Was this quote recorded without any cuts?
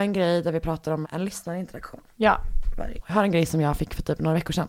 no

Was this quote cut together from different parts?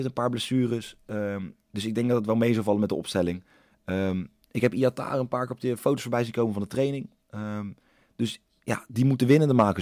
no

